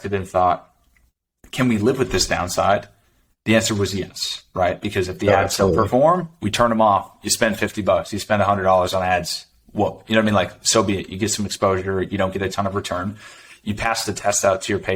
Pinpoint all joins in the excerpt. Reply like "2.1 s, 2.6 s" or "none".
none